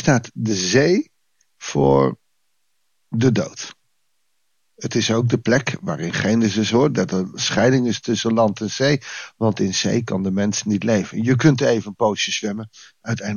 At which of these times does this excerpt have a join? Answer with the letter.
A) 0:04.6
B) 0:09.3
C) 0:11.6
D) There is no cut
D